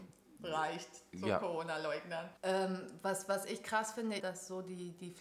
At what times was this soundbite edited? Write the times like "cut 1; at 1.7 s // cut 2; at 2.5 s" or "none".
cut 1; at 2.4 s // cut 2; at 4.2 s